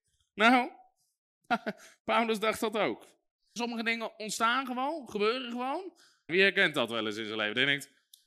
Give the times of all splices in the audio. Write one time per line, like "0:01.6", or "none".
0:03.6
0:06.3